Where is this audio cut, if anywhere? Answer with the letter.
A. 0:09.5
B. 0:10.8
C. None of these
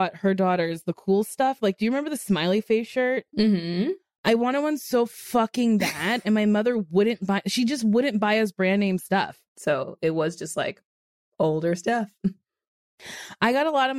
A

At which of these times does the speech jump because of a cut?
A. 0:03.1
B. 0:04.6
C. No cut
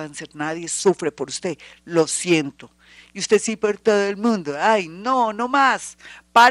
C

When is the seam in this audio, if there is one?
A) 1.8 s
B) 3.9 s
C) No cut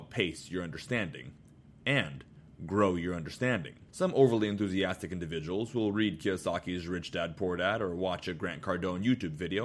B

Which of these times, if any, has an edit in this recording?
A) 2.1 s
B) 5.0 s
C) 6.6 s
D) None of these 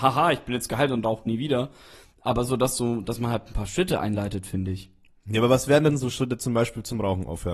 D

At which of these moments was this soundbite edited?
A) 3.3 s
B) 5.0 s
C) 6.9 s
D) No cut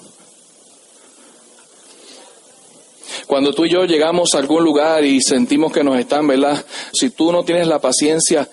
C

